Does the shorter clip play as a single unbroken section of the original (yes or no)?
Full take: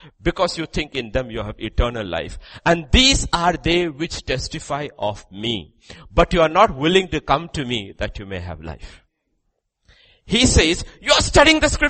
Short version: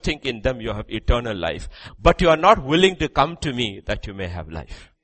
no